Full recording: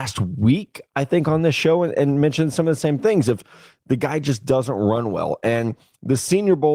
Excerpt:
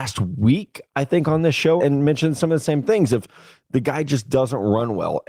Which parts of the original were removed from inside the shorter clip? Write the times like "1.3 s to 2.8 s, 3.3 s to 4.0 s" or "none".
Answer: 1.8 s to 1.9 s

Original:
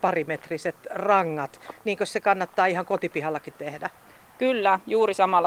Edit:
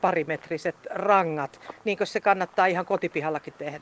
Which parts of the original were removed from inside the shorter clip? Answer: none

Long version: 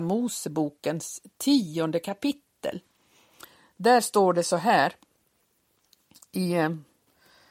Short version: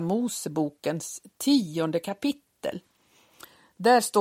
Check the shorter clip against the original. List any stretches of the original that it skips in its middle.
none

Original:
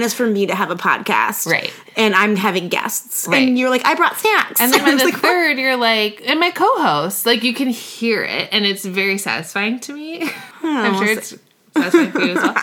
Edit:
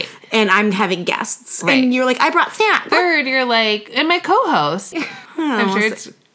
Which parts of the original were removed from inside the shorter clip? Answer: 4.5 s to 5.2 s, 7.2 s to 10.2 s

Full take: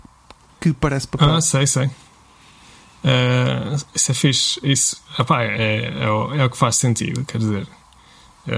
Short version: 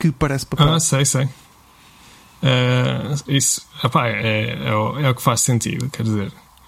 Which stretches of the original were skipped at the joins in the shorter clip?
3.9 s to 4.6 s

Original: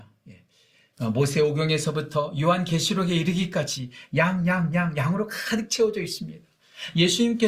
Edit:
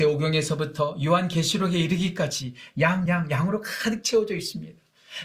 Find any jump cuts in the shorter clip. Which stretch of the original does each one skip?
4.4 s to 4.7 s

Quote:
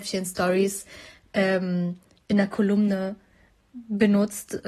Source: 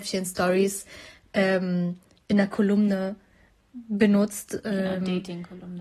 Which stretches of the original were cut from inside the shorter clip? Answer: none

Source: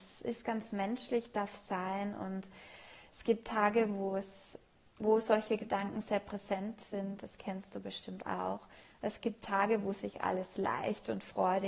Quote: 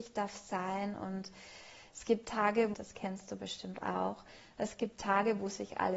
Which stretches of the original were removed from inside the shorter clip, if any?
3.9 s to 7.2 s

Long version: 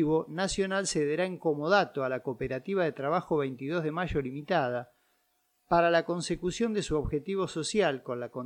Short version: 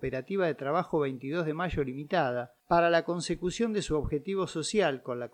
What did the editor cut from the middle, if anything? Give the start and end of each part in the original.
5.0 s to 5.6 s

